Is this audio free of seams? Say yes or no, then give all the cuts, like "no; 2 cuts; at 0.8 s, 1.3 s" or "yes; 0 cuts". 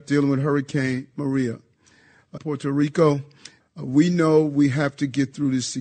no; 2 cuts; at 2.4 s, 3.6 s